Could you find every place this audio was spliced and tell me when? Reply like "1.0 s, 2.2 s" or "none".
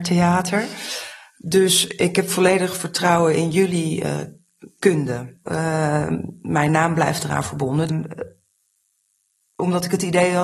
5.5 s, 7.9 s